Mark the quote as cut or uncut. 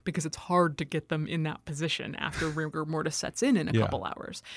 uncut